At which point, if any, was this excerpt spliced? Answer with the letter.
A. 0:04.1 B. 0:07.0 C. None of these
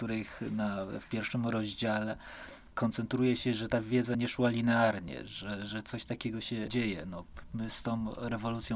A